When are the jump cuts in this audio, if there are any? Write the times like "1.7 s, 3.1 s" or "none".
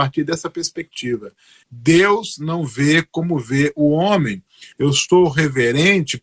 1.6 s, 4.7 s